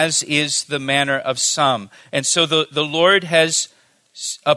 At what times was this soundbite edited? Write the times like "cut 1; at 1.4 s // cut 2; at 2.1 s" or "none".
none